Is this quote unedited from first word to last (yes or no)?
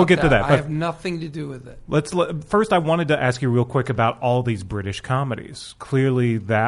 yes